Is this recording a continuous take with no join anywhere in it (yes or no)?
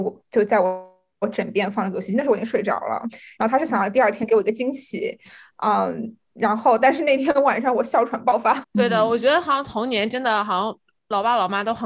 no